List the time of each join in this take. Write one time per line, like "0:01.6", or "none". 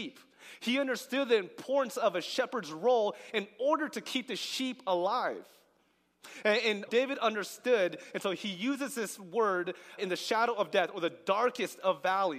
0:06.9
0:10.0